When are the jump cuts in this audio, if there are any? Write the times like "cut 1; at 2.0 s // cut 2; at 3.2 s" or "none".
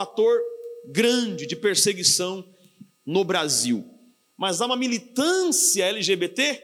cut 1; at 4.2 s